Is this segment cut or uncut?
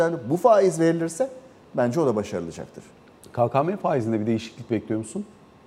uncut